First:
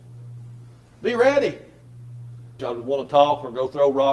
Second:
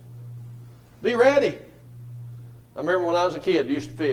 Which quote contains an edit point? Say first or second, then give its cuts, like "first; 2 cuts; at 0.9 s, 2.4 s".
first; 1 cut; at 2.6 s